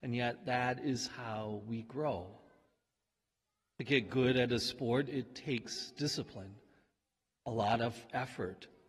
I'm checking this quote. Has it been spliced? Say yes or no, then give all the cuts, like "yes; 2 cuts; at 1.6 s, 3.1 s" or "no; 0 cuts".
no; 0 cuts